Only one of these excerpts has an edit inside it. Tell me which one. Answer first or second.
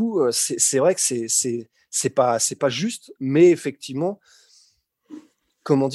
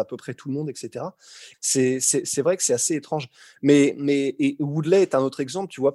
second